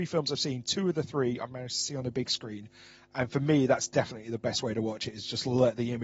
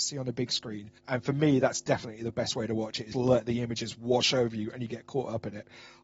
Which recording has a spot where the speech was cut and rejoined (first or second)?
second